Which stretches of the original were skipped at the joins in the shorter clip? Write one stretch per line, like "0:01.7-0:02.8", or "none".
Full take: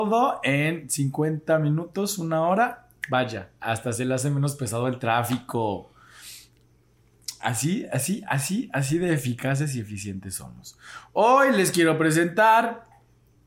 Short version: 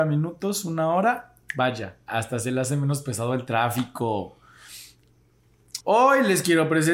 0:07.3-0:11.1